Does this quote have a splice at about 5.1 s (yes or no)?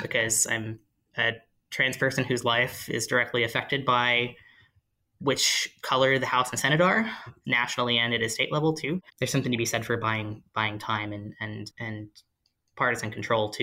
no